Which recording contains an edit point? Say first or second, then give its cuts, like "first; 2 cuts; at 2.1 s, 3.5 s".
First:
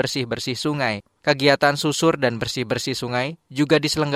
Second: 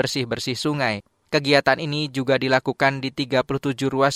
first; 1 cut; at 1.1 s